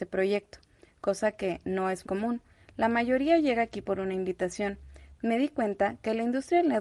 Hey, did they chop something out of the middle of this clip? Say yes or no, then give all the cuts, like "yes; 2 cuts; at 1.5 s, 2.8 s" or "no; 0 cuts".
yes; 2 cuts; at 2.0 s, 5.2 s